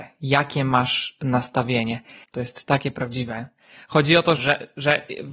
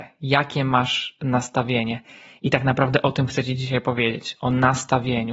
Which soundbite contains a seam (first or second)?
first